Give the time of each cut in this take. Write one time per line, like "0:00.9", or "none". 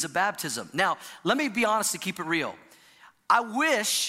none